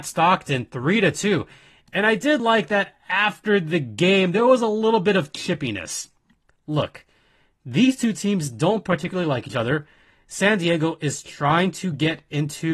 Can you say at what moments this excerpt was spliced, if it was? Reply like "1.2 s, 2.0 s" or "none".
none